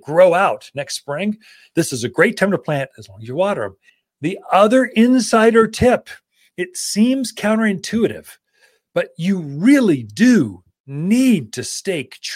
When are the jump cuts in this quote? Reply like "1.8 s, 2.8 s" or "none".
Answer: none